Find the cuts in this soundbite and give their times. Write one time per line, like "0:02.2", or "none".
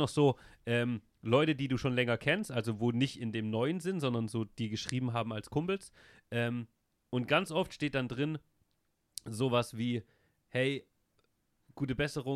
0:10.4